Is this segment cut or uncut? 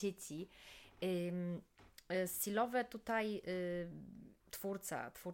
cut